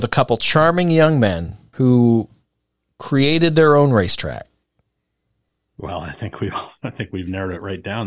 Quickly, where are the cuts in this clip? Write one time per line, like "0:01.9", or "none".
0:01.7